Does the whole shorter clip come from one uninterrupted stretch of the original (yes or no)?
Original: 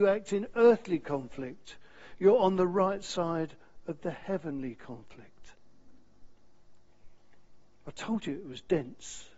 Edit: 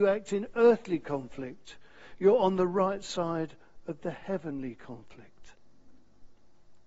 yes